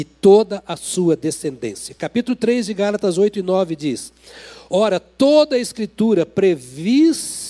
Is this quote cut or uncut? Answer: uncut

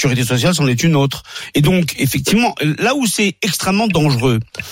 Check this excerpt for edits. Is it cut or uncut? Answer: cut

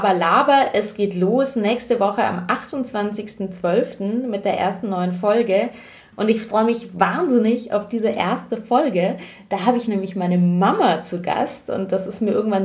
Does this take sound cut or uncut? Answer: cut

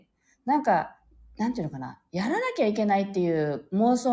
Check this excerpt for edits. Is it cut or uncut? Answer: uncut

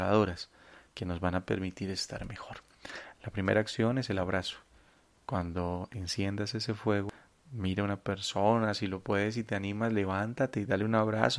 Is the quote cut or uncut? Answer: uncut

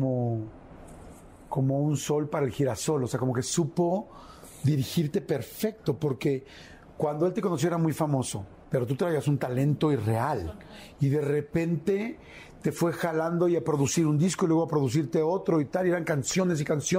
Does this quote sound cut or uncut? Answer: cut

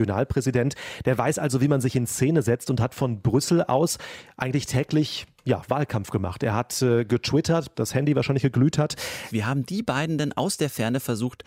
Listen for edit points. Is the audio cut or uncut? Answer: cut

